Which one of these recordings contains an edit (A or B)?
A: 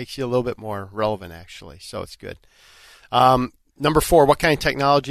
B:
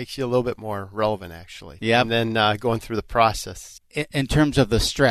B